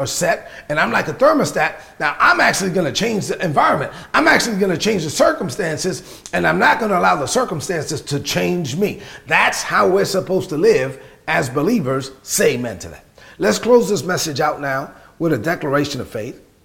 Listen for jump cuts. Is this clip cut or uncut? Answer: uncut